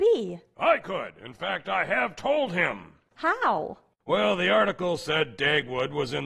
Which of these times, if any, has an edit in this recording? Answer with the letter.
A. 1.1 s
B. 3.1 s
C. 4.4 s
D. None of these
B